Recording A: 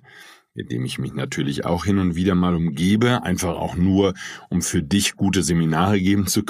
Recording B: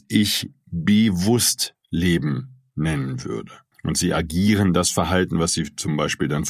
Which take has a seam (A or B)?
B